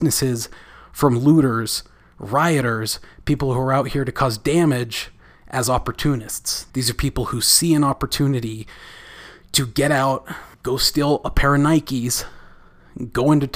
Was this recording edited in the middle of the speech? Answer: yes; 2 cuts; at 6.7 s, 10.5 s

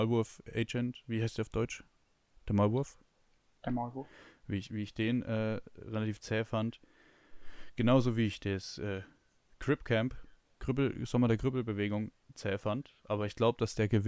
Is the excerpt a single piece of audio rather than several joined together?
yes; 0 cuts

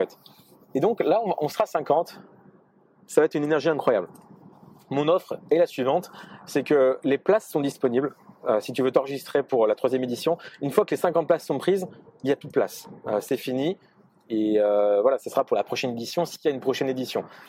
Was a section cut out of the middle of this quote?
no; 0 cuts

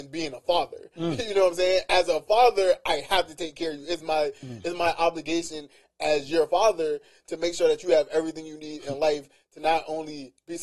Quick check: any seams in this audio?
no; 0 cuts

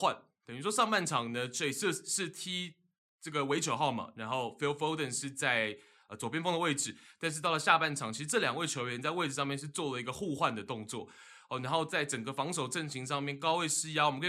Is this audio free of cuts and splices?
yes; 0 cuts

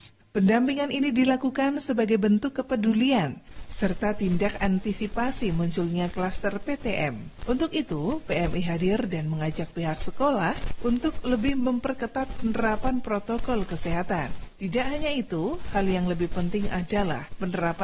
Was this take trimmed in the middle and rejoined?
no; 0 cuts

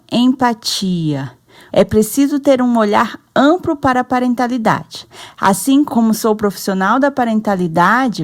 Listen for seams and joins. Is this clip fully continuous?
no; 1 cut; at 1.7 s

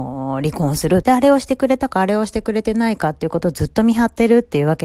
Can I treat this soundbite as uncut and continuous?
no; 1 cut; at 1.0 s

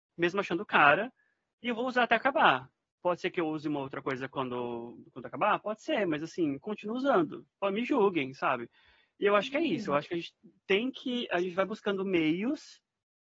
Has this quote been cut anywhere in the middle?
no; 0 cuts

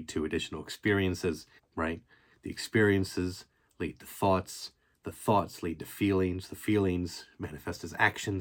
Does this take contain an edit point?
yes; 1 cut; at 1.6 s

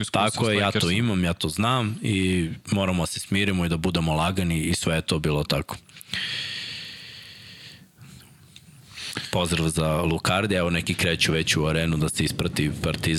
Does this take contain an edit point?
no; 0 cuts

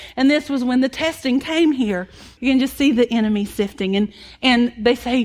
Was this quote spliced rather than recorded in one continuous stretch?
yes; 1 cut; at 2.4 s

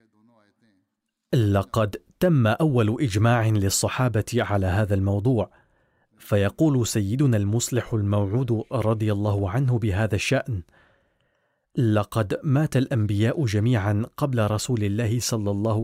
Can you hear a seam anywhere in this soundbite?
no; 0 cuts

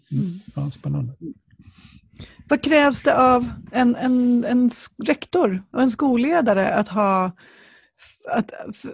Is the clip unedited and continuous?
yes; 0 cuts

